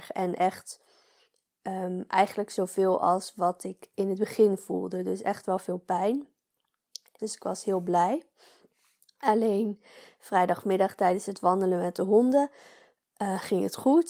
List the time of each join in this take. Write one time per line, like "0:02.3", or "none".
0:07.2